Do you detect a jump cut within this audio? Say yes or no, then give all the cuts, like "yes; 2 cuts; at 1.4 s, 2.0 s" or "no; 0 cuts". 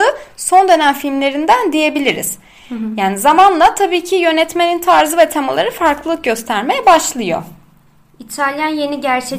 no; 0 cuts